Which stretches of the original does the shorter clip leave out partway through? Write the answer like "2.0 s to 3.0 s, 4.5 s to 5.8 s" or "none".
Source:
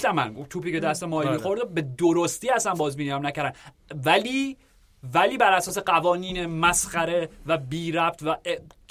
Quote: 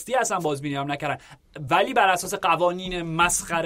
4.0 s to 5.1 s